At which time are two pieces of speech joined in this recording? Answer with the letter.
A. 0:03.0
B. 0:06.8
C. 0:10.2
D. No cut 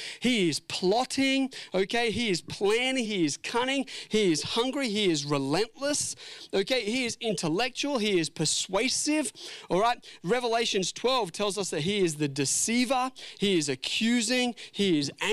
A